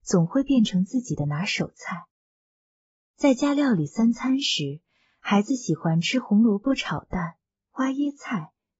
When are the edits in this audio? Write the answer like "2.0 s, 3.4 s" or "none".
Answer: none